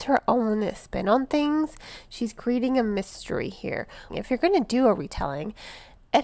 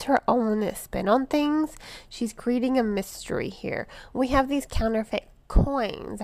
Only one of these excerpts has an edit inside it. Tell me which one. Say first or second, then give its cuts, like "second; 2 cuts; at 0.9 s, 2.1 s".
first; 1 cut; at 4.1 s